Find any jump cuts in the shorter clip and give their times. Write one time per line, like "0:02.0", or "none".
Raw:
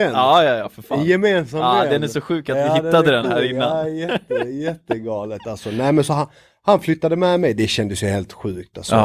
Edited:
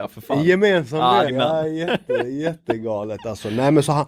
0:01.3